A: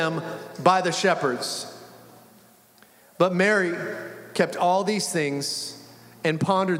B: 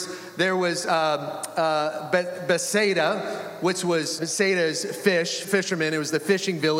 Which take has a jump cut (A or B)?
B